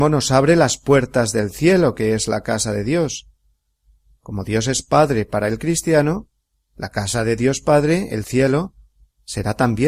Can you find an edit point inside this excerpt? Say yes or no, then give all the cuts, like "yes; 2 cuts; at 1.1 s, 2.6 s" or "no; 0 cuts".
no; 0 cuts